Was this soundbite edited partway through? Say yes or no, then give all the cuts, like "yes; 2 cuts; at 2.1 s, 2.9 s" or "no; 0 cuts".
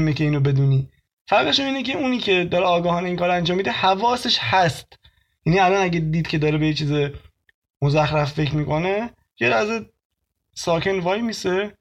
no; 0 cuts